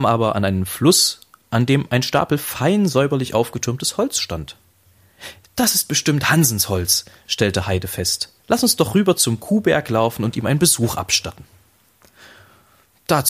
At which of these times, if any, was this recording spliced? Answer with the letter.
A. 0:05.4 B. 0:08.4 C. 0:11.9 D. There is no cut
B